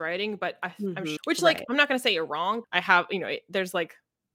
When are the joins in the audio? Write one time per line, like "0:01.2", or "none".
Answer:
0:01.2
0:02.6